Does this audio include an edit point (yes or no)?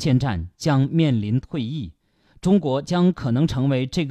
no